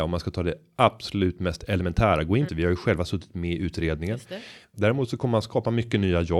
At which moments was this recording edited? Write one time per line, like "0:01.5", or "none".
0:02.5
0:04.7